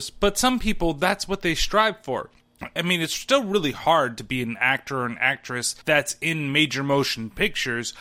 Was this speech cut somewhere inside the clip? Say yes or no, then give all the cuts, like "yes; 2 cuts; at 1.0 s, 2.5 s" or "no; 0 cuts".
yes; 2 cuts; at 2.8 s, 5.8 s